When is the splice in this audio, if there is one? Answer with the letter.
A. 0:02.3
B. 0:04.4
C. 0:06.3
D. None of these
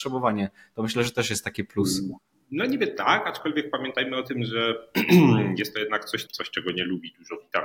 C